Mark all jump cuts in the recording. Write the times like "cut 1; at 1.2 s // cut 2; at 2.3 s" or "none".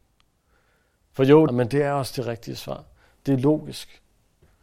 cut 1; at 1.5 s